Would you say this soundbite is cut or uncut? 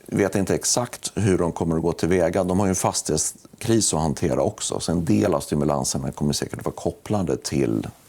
uncut